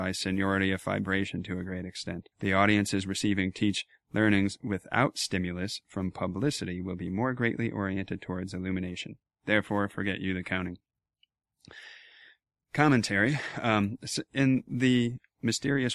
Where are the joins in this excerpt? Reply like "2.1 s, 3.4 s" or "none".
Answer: 2.3 s